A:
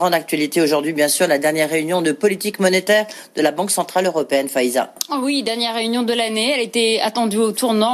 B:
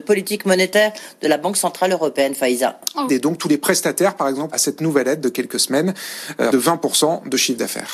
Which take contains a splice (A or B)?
B